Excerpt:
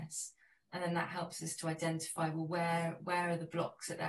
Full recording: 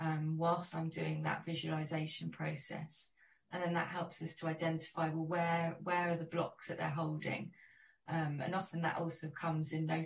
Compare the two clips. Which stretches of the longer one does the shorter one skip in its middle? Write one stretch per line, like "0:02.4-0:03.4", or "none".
none